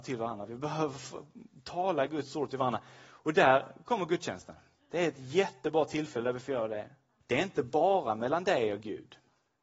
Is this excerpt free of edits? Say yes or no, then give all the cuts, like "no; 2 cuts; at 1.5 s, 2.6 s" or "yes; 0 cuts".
no; 1 cut; at 7.2 s